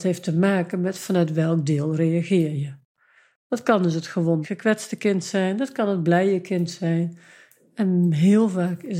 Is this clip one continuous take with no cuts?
yes; 0 cuts

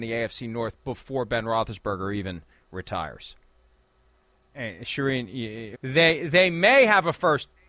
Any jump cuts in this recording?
yes; 2 cuts; at 4.3 s, 5.7 s

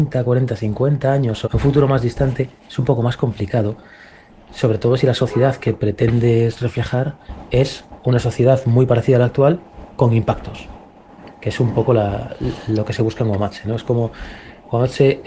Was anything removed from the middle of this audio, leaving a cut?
yes; 1 cut; at 1.4 s

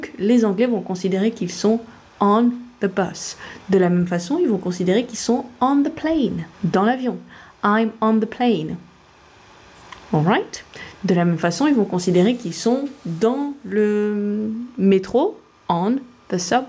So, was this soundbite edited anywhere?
yes; 1 cut; at 6.5 s

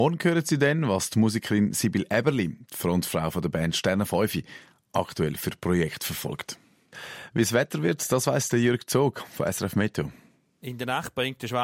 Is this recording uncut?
yes; 0 cuts

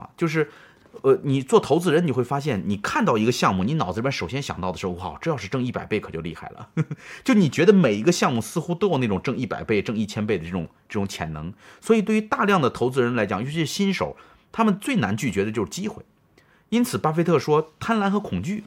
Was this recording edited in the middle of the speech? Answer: no; 0 cuts

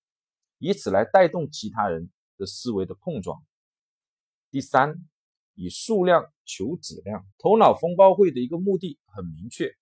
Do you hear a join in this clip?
yes; 1 cut; at 7.3 s

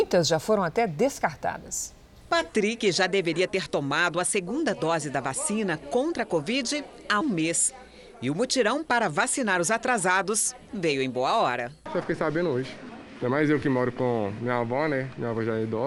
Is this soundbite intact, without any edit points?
no; 1 cut; at 7.2 s

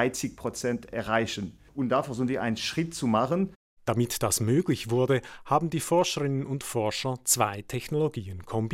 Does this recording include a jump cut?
yes; 1 cut; at 1.7 s

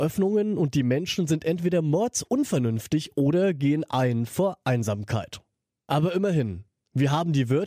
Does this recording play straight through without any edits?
yes; 0 cuts

